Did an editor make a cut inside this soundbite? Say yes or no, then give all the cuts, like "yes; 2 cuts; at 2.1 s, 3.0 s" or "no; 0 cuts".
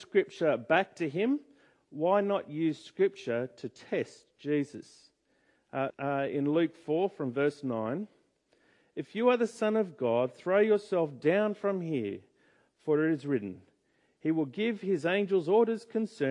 yes; 1 cut; at 5.9 s